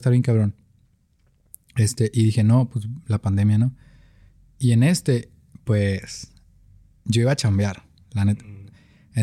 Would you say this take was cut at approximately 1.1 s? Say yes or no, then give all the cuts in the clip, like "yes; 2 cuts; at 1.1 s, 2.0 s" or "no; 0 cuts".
no; 0 cuts